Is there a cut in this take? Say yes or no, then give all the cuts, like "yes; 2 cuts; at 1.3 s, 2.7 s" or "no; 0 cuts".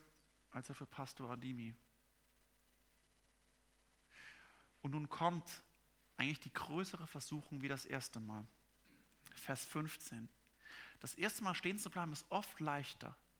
no; 0 cuts